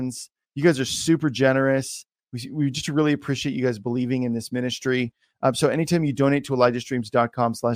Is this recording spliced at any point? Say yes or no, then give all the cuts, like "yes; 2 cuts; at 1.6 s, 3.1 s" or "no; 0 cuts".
no; 0 cuts